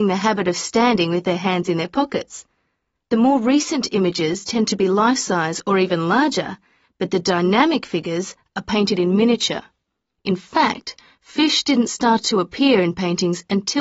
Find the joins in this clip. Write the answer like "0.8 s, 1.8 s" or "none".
3.0 s, 10.2 s

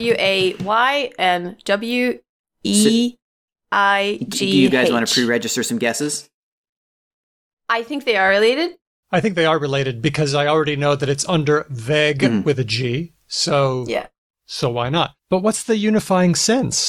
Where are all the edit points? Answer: 15.2 s

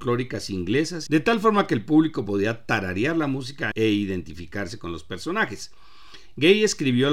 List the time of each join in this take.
1.1 s, 3.7 s

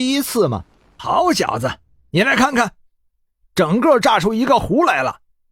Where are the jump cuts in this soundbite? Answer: 1.0 s

